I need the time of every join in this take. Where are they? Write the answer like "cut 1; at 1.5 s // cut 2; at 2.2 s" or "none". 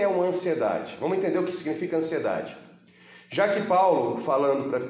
none